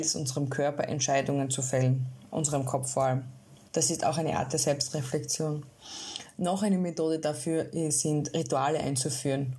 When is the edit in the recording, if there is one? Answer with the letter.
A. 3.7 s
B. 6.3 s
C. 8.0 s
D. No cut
A